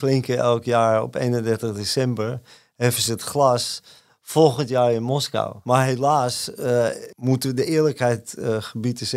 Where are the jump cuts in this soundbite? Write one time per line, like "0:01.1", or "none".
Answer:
none